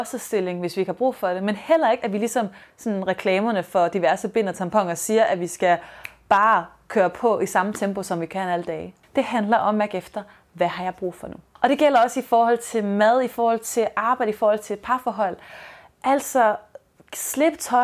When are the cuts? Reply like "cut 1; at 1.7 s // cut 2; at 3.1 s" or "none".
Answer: none